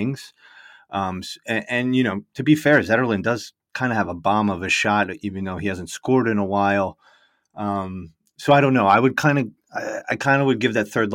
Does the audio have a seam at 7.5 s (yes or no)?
no